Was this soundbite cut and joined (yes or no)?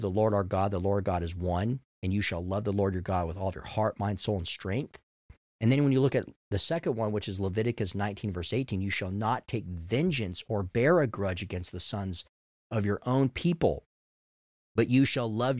no